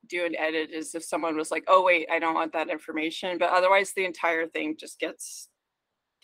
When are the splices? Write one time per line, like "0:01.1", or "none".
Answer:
none